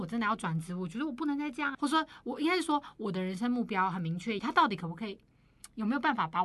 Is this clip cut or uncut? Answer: cut